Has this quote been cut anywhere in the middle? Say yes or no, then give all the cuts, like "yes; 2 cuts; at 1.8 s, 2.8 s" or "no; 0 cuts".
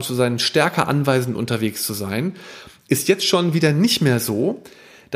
no; 0 cuts